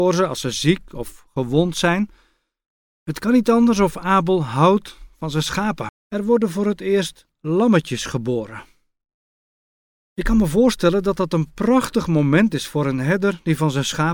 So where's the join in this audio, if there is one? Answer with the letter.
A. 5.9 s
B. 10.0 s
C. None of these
A